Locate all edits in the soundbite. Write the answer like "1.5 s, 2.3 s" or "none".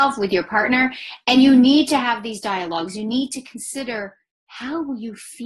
none